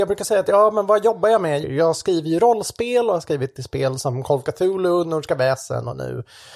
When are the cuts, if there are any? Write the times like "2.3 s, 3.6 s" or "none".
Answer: 1.6 s